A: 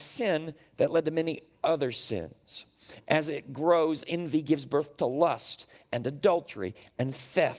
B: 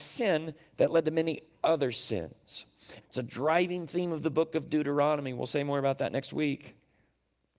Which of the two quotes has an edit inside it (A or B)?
B